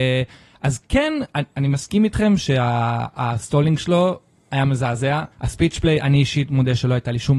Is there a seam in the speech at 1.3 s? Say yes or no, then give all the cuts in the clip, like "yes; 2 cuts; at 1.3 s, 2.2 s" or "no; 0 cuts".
no; 1 cut; at 5.3 s